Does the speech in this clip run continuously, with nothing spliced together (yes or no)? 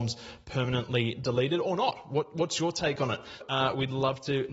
no